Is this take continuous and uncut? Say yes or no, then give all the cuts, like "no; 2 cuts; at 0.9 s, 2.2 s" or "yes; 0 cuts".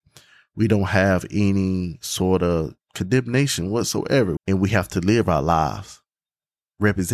no; 1 cut; at 4.4 s